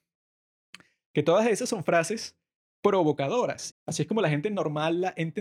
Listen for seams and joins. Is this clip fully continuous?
no; 1 cut; at 3.7 s

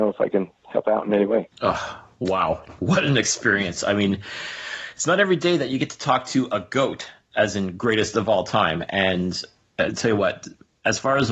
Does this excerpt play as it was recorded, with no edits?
no; 2 cuts; at 1.5 s, 2.8 s

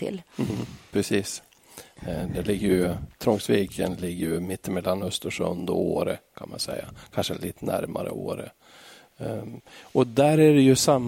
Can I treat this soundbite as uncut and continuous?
yes; 0 cuts

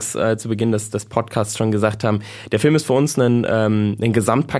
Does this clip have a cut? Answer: no; 0 cuts

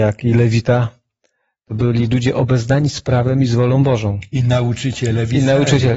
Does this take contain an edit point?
no; 0 cuts

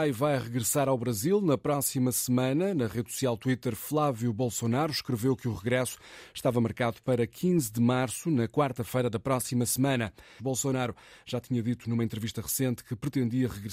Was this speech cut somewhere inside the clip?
yes; 1 cut; at 10.4 s

